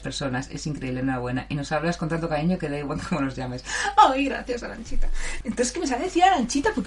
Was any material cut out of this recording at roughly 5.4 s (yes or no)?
yes